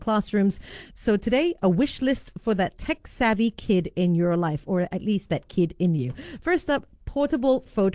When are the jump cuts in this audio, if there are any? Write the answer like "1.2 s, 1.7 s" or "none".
0.9 s